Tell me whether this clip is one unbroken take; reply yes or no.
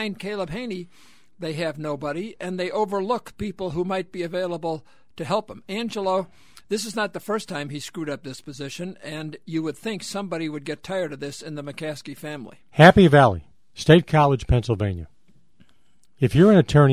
yes